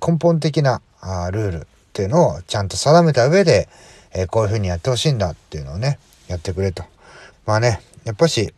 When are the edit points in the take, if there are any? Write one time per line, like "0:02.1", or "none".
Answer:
0:07.3